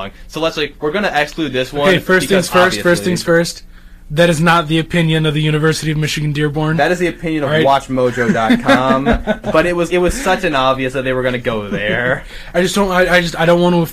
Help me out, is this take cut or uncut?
cut